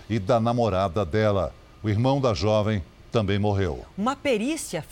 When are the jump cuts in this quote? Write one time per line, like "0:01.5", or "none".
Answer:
none